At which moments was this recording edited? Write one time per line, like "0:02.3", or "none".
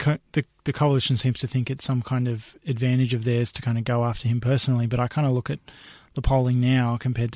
none